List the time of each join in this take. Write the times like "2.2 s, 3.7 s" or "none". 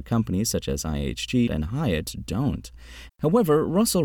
1.5 s, 3.1 s